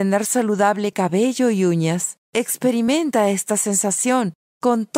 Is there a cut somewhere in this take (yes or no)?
yes